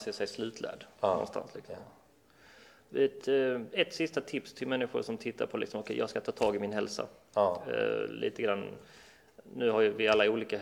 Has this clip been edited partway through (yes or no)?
yes